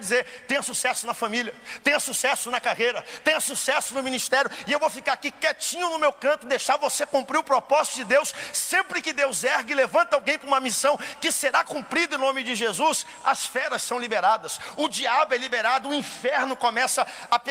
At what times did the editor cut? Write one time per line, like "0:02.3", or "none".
none